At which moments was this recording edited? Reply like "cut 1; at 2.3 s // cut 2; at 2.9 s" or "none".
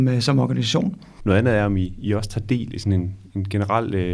cut 1; at 1.2 s